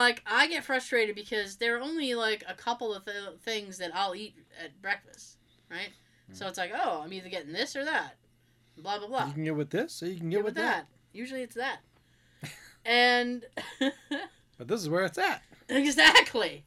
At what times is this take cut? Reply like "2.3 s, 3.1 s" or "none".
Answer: none